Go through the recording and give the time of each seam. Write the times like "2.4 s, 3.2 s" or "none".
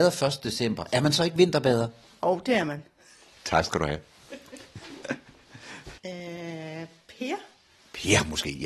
6.0 s